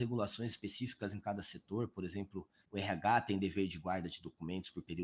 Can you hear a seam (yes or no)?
no